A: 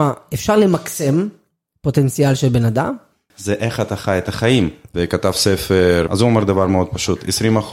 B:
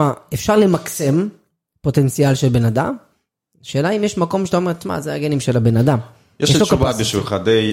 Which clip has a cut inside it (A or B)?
A